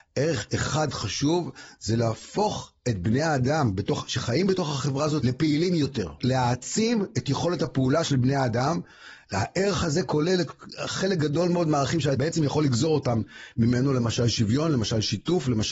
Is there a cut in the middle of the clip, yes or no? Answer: no